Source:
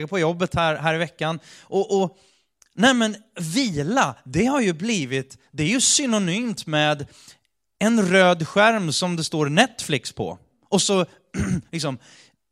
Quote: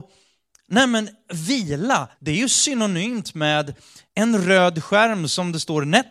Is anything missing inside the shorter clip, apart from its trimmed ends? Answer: yes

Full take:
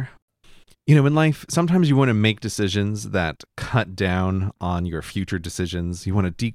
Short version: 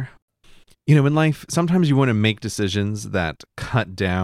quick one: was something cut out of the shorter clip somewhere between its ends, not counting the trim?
no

